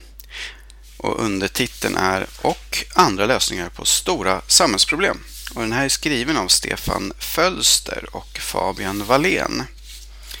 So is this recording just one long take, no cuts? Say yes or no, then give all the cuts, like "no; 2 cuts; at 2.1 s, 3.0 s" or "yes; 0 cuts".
yes; 0 cuts